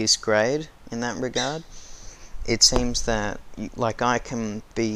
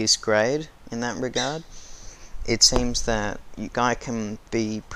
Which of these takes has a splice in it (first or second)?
second